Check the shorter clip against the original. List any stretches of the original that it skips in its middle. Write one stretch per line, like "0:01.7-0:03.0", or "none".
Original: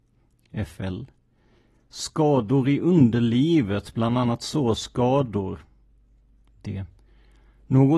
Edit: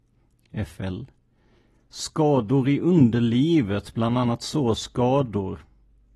none